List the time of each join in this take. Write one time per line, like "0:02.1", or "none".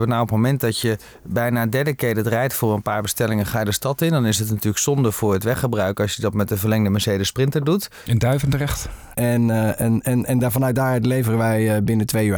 0:08.1
0:09.1